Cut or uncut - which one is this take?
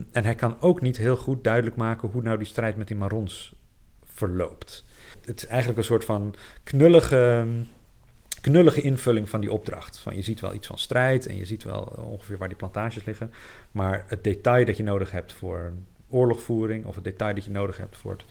uncut